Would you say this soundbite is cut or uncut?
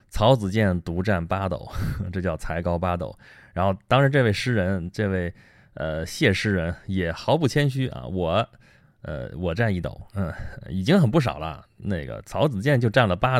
uncut